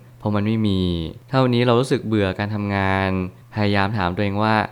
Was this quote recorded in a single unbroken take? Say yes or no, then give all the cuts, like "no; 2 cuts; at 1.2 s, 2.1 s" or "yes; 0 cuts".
yes; 0 cuts